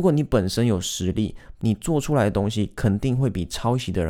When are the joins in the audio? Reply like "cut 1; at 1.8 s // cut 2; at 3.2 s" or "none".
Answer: cut 1; at 1.6 s